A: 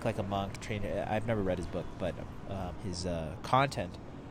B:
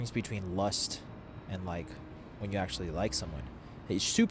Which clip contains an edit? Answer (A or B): A